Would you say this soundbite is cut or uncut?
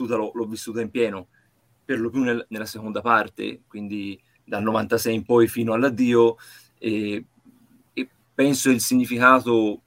uncut